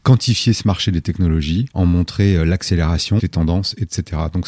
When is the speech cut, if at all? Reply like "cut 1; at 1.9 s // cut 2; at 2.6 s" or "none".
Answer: cut 1; at 1.7 s // cut 2; at 3.2 s